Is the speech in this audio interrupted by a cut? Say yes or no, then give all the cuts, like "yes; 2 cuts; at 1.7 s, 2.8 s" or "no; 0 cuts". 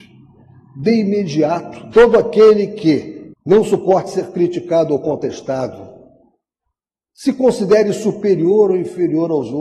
yes; 2 cuts; at 1.9 s, 3.3 s